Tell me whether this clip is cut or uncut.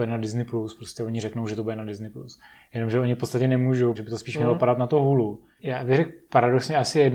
cut